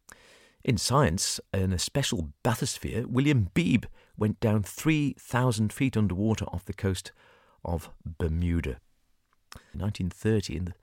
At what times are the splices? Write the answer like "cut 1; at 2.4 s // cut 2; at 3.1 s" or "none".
cut 1; at 9.7 s